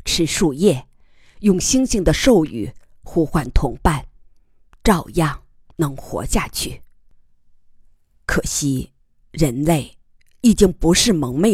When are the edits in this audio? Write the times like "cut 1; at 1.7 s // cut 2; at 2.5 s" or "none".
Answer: none